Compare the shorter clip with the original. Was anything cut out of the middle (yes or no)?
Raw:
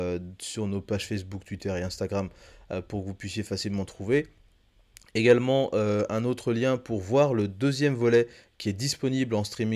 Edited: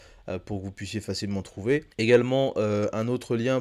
yes